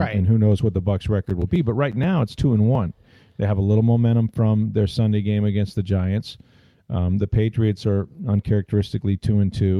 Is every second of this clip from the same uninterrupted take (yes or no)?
yes